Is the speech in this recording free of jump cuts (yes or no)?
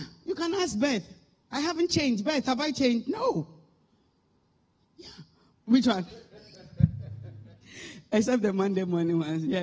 no